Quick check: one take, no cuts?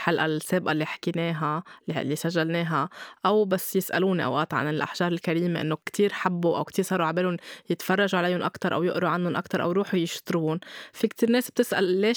no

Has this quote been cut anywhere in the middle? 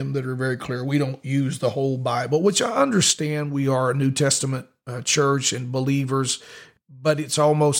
no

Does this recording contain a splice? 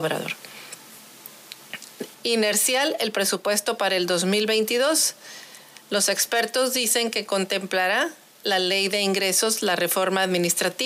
yes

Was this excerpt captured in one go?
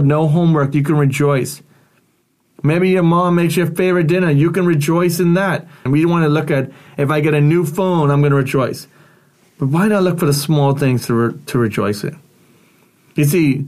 no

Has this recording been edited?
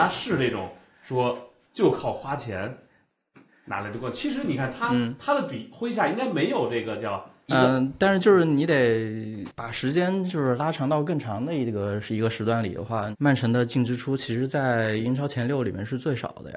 yes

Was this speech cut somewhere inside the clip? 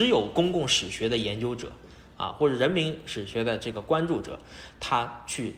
no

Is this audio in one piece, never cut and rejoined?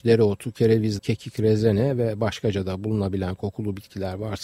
no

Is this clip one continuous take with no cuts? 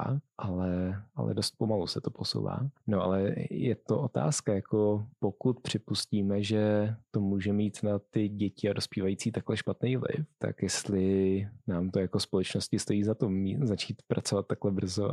yes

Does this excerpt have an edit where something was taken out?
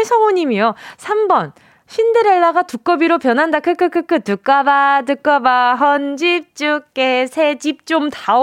no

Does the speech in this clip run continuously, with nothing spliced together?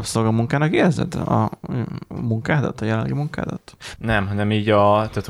no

